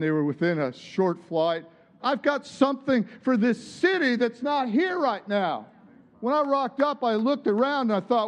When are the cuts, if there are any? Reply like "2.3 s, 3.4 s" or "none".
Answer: 2.0 s